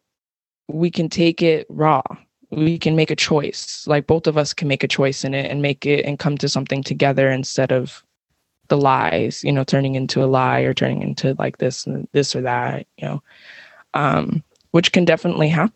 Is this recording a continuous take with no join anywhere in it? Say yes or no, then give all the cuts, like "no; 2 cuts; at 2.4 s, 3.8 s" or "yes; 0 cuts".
yes; 0 cuts